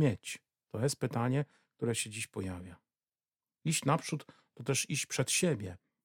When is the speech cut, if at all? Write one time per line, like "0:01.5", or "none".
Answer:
none